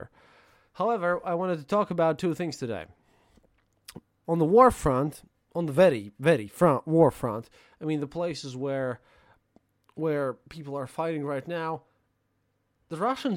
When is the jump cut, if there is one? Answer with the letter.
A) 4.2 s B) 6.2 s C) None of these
A